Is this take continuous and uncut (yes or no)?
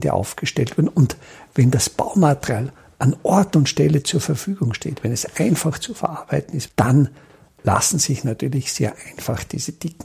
no